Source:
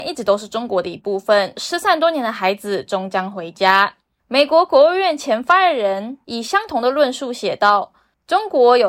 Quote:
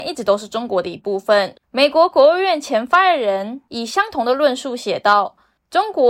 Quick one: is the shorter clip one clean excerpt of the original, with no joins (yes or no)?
no